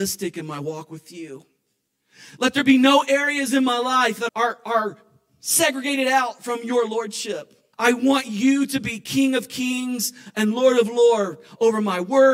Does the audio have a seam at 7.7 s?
yes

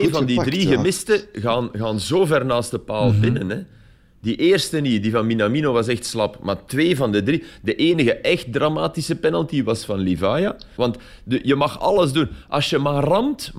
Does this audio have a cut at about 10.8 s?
yes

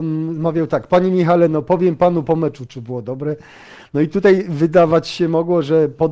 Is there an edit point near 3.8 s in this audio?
no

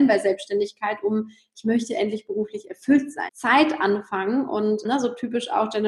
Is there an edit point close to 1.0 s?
no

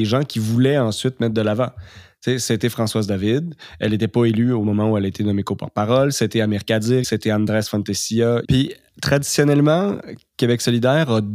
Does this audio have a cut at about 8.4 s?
yes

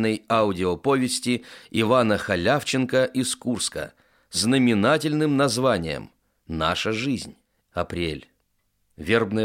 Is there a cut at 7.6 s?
yes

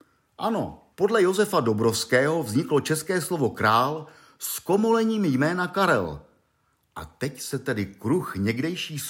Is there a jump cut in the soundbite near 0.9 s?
yes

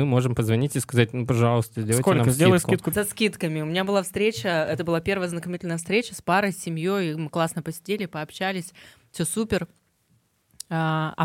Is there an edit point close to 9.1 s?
no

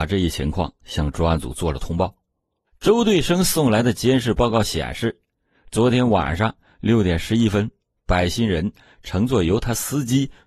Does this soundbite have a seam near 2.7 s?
yes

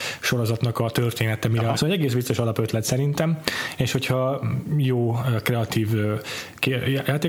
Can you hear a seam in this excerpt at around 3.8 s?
no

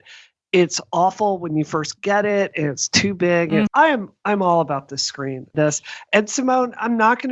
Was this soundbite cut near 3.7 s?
yes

